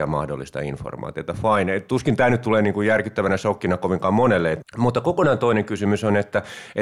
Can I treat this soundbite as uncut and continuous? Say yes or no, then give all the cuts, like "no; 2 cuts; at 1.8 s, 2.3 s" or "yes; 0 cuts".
yes; 0 cuts